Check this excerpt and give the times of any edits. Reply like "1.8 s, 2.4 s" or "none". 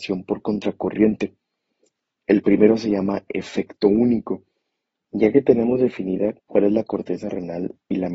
2.2 s, 5.0 s